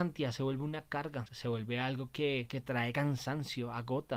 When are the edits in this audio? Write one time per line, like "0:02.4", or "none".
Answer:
0:01.3

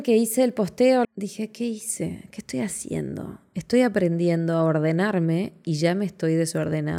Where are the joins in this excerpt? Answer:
0:01.0

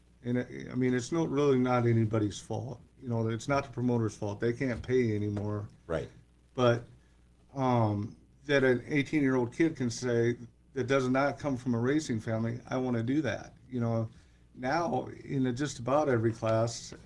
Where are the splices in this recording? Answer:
none

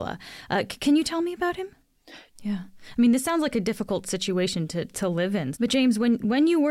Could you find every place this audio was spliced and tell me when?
0:02.3
0:05.5

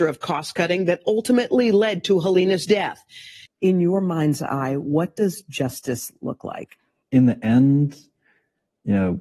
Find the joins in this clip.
0:03.5
0:07.0

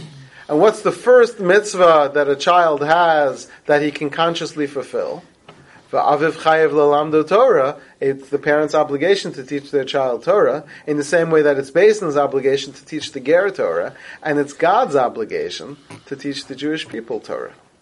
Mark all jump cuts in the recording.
none

